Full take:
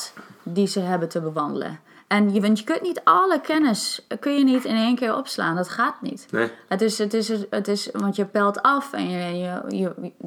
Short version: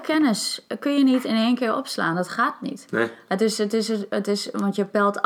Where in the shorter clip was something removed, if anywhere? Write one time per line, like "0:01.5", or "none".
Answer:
none